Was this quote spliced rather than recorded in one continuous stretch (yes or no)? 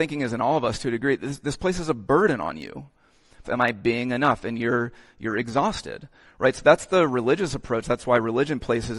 yes